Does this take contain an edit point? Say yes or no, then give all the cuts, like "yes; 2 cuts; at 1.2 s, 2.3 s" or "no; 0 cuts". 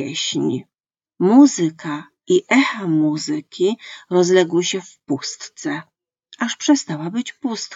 yes; 1 cut; at 1.1 s